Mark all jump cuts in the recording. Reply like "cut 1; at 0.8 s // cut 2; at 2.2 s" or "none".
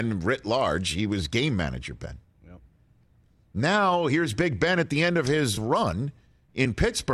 none